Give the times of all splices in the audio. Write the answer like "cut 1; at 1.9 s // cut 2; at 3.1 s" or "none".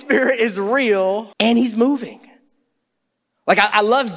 cut 1; at 1.3 s